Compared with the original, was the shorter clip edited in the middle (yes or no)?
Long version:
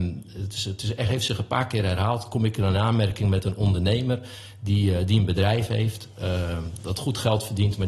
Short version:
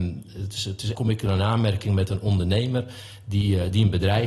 yes